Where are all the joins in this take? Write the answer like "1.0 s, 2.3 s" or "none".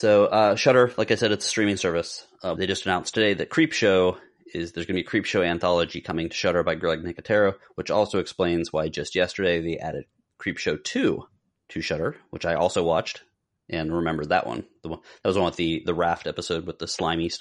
2.6 s